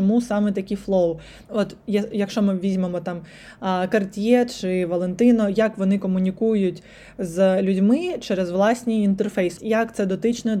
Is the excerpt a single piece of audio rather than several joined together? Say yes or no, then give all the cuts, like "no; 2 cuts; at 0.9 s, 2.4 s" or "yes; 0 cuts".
no; 2 cuts; at 1.4 s, 9.6 s